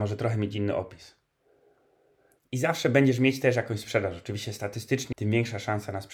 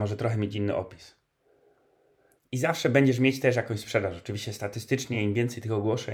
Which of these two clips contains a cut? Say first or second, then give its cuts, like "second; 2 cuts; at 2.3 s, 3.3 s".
first; 1 cut; at 5.1 s